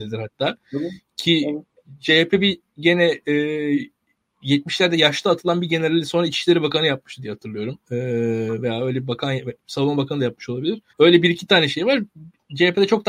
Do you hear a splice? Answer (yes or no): yes